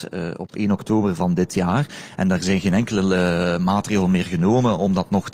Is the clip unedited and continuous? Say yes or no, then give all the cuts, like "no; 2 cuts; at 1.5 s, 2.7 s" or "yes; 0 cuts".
no; 1 cut; at 1.2 s